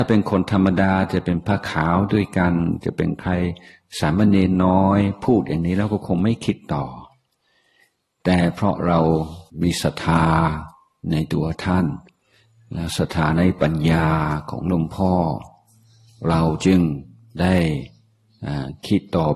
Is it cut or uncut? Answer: cut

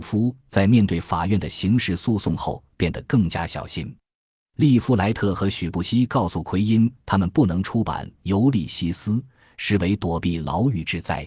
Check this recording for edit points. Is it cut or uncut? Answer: uncut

